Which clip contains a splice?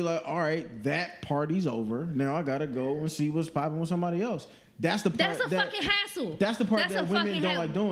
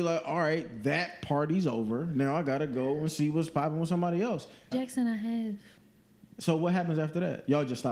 second; 1 cut; at 4.7 s

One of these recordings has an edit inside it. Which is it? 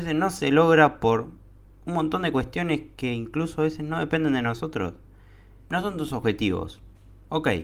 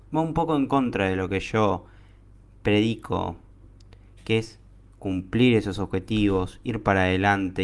first; 1 cut; at 5.6 s

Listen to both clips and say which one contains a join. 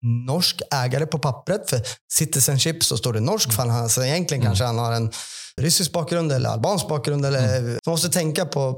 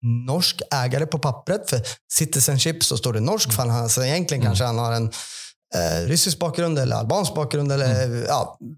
first; 2 cuts; at 5.6 s, 7.8 s

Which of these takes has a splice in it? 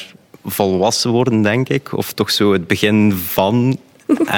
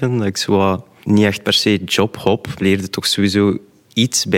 second; 1 cut; at 2.6 s

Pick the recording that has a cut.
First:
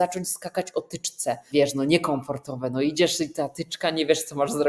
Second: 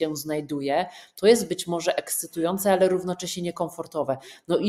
first; 1 cut; at 1.5 s

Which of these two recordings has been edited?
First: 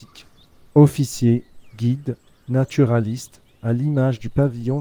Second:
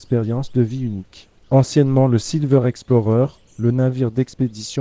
second; 1 cut; at 1.4 s

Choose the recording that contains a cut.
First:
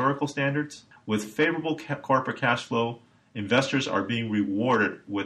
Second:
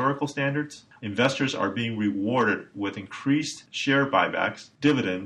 second; 1 cut; at 1.0 s

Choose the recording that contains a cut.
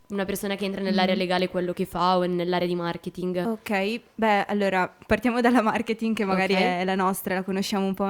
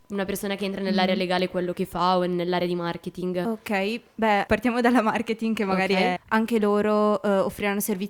second; 2 cuts; at 4.5 s, 6.2 s

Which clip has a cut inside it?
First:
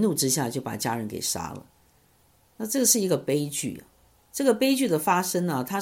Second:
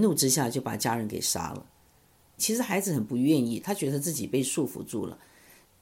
second; 2 cuts; at 2.4 s, 3.6 s

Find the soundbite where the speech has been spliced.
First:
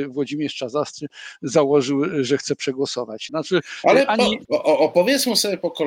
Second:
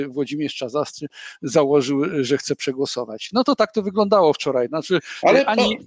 first; 2 cuts; at 3.3 s, 4.5 s

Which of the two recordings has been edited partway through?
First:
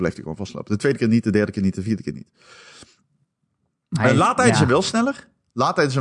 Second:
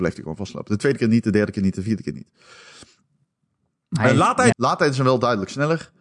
second; 1 cut; at 4.5 s

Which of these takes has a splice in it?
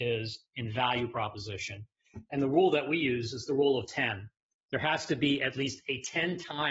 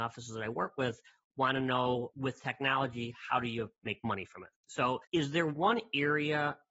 second; 1 cut; at 5.0 s

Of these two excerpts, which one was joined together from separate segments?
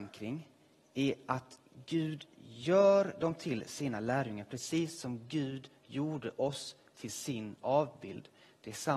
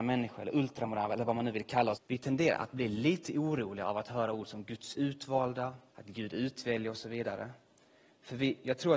second; 2 cuts; at 2.0 s, 5.9 s

